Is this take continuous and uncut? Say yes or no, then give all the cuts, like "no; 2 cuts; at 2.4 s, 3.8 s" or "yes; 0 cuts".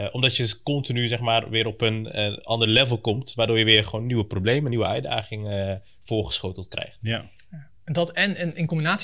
yes; 0 cuts